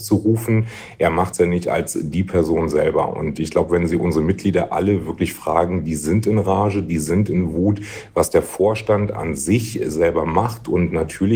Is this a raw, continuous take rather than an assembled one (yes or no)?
yes